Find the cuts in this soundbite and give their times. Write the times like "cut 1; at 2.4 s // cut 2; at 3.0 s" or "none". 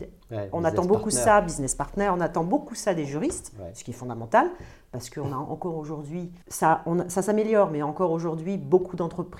cut 1; at 6.4 s